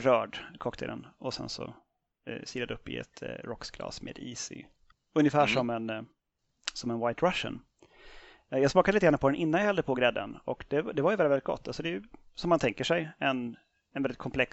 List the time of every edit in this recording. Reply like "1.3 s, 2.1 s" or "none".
4.9 s